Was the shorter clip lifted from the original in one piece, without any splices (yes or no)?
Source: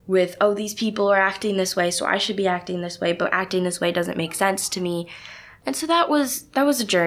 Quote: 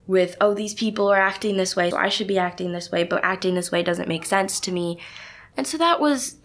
no